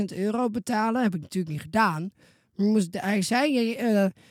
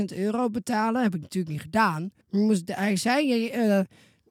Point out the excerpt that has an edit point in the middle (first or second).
second